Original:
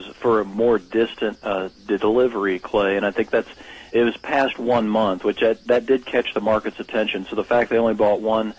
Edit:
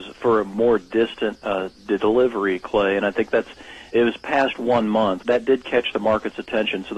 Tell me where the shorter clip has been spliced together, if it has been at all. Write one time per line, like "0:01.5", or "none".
0:05.2